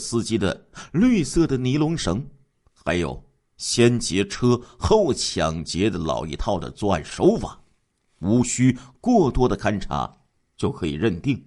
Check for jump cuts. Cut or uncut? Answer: uncut